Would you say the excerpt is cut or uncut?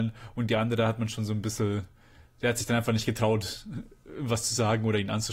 uncut